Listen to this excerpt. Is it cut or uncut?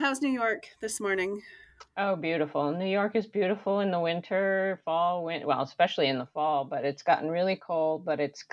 uncut